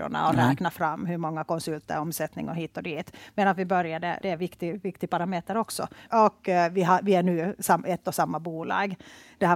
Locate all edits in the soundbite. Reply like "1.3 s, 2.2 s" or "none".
4.2 s, 6.1 s